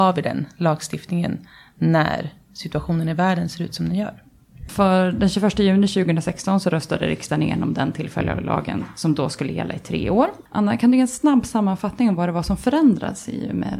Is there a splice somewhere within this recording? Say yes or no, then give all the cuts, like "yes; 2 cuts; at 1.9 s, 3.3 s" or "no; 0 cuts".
yes; 2 cuts; at 4.7 s, 10.5 s